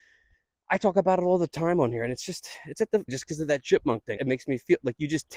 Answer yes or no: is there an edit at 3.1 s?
yes